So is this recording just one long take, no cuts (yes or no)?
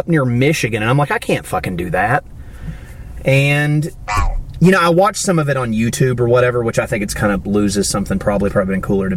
yes